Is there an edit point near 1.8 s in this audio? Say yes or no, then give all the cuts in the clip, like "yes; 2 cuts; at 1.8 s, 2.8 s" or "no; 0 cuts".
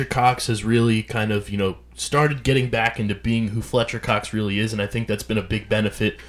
no; 0 cuts